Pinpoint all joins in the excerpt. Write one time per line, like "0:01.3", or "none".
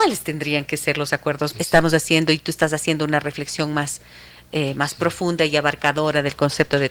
0:01.5